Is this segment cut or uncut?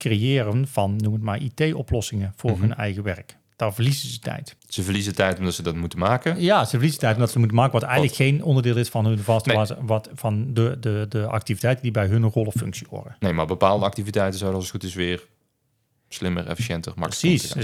cut